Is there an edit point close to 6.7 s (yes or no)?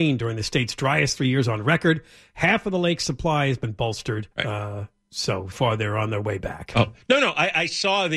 no